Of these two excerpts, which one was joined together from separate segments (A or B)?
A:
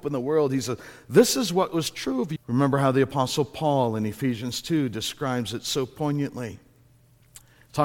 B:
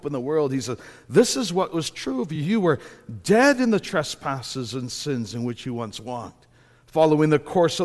A